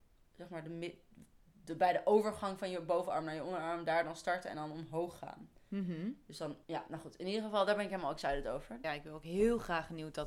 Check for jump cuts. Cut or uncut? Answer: cut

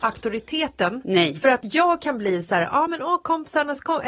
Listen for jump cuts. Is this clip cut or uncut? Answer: uncut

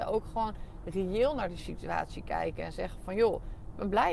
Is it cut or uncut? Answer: uncut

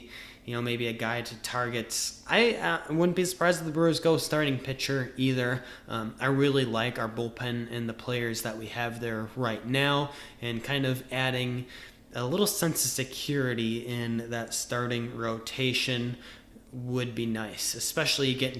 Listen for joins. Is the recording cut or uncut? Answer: uncut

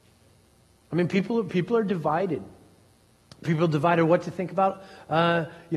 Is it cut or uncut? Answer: uncut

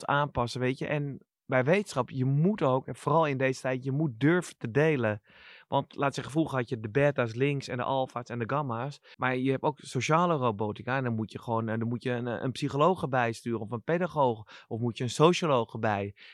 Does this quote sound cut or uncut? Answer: cut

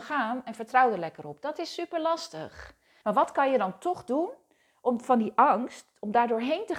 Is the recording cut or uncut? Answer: cut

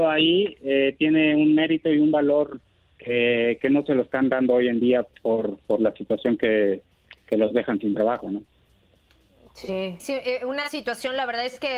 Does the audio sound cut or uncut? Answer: cut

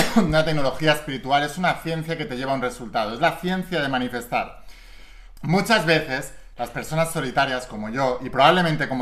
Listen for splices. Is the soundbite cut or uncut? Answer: cut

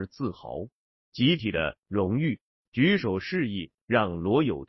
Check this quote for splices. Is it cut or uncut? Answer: cut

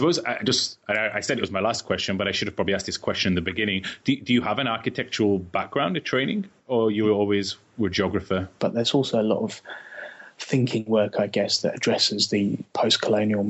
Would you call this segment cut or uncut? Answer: cut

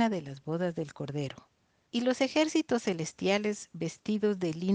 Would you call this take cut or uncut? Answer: cut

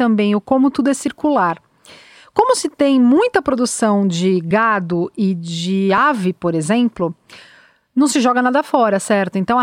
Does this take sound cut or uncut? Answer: uncut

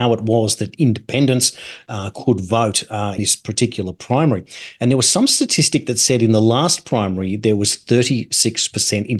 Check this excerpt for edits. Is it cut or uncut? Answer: cut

